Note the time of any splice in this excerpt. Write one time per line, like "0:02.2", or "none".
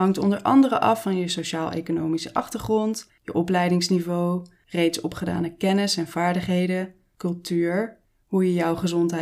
none

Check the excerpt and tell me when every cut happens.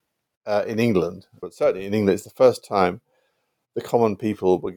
0:01.4

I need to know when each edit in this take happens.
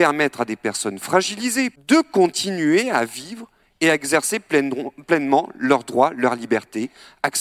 0:01.8

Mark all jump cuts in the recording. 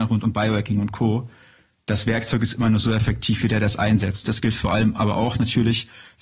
0:04.2

